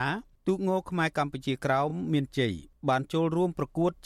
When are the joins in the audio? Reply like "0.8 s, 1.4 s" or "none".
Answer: none